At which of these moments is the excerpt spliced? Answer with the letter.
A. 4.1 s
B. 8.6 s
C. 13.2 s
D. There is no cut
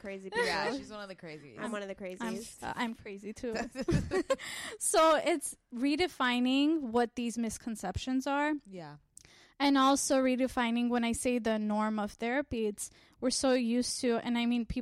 D